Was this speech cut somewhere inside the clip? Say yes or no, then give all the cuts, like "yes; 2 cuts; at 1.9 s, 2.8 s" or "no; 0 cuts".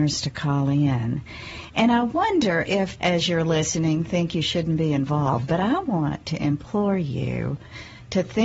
yes; 1 cut; at 3.0 s